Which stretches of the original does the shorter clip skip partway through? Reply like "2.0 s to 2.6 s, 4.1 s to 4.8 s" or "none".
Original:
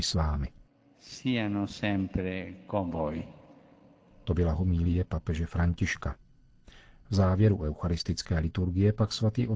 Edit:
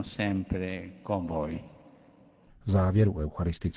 4.1 s to 6.9 s

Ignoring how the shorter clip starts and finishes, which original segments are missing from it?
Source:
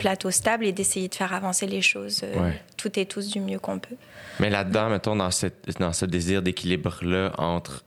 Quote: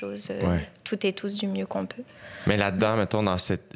none

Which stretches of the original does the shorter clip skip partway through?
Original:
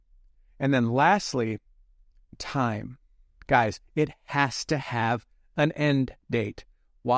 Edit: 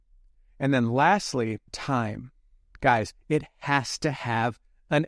1.7 s to 2.3 s

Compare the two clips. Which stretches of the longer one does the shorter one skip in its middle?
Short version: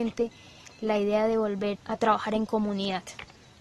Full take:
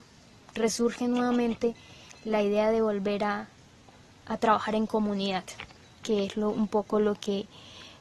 3.2 s to 4.2 s

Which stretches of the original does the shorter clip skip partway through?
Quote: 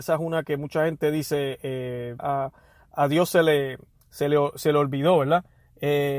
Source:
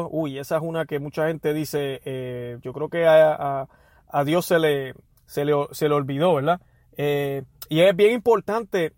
2.6 s to 3.4 s

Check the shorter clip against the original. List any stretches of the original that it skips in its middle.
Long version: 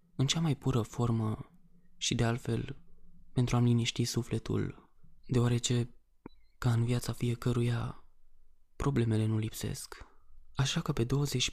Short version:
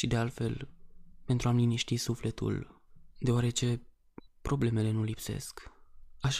6.4 s to 8.6 s

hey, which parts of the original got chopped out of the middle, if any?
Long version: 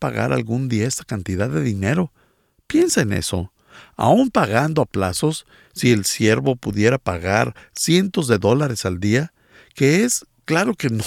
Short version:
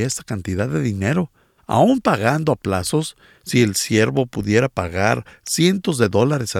2.4 s to 3.9 s

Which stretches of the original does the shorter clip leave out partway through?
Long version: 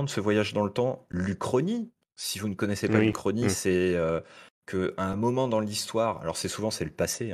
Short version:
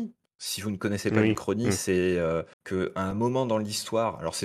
4.3 s to 4.6 s

